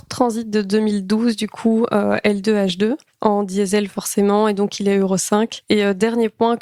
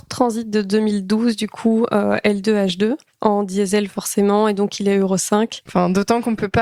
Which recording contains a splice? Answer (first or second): second